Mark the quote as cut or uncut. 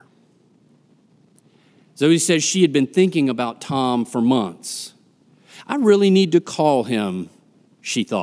uncut